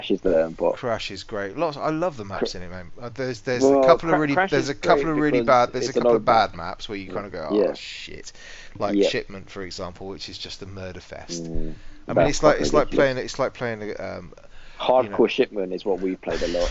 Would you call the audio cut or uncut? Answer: uncut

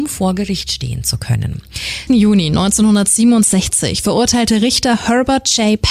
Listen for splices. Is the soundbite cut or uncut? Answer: cut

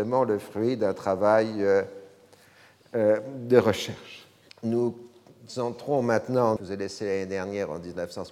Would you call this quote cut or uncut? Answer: cut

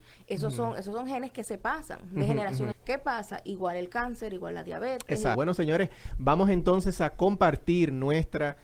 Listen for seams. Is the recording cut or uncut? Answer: cut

